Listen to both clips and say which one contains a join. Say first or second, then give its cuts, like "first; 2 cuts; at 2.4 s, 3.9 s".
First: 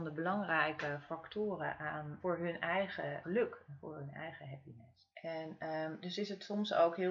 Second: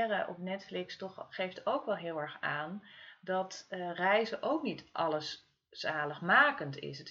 first; 3 cuts; at 2.2 s, 3.2 s, 5.1 s